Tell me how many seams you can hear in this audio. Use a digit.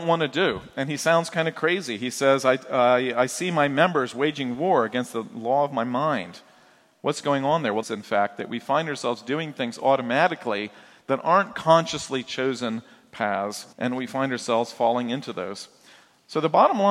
2